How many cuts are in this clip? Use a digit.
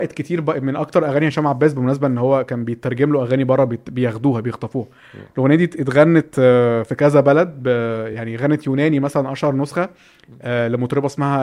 0